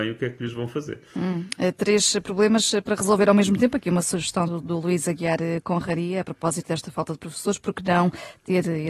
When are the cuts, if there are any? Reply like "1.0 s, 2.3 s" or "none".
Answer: none